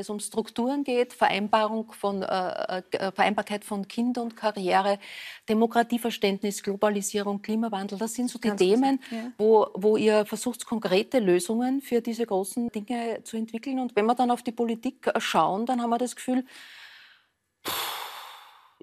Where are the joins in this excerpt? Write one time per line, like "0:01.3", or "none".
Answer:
0:12.7